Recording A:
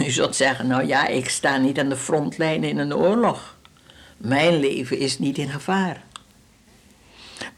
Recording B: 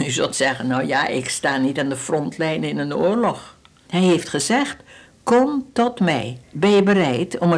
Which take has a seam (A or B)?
B